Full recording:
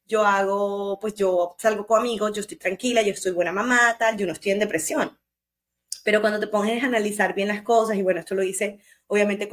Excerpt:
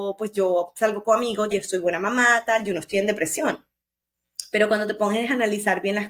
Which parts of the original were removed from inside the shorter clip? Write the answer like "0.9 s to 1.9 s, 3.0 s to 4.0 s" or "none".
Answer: 2.3 s to 3.0 s

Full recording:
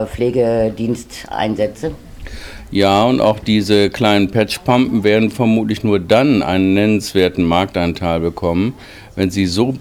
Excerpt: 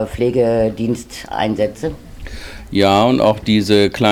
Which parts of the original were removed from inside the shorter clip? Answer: none

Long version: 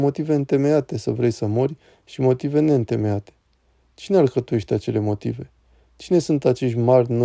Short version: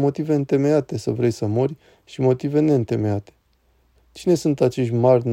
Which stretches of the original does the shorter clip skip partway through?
3.9 s to 5.8 s

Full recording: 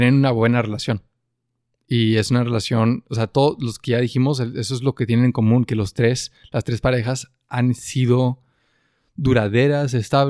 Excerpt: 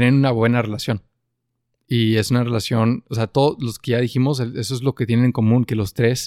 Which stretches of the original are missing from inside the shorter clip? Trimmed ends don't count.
none

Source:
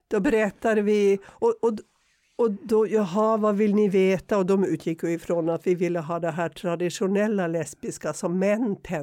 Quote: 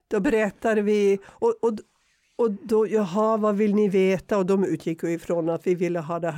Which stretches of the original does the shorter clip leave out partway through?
none

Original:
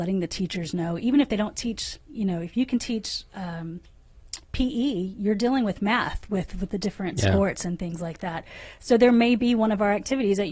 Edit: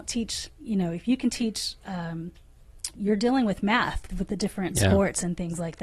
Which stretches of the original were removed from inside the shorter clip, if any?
4.4 s to 5.1 s, 6.3 s to 6.5 s

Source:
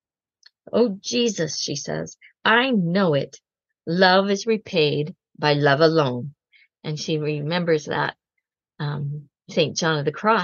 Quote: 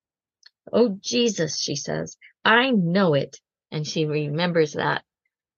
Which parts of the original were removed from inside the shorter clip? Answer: 3.6 s to 6.7 s

